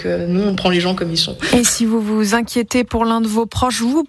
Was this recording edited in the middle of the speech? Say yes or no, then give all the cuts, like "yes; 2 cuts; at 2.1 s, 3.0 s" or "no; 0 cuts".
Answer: no; 0 cuts